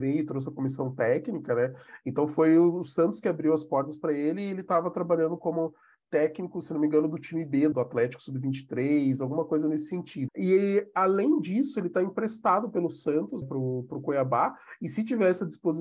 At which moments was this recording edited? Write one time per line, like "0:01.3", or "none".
0:07.7
0:10.3
0:13.4

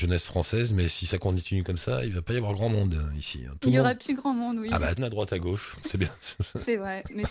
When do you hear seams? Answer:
0:05.0

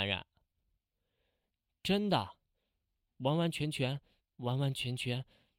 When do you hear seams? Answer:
0:04.2

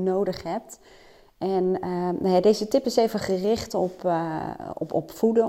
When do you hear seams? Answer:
none

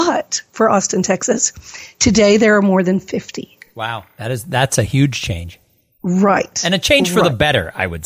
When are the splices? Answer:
none

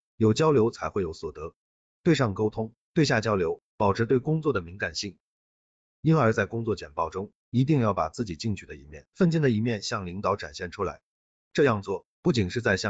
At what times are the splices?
none

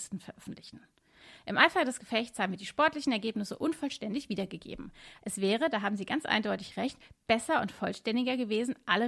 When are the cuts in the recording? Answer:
0:05.2

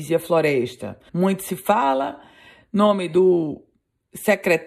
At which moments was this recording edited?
0:01.1

